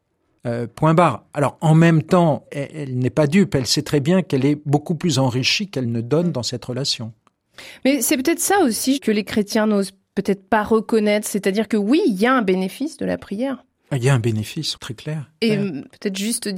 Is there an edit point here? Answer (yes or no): yes